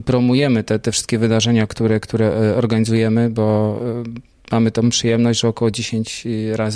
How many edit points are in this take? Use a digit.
0